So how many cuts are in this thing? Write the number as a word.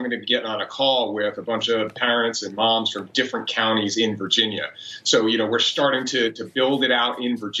zero